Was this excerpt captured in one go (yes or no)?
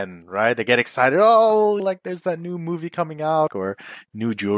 no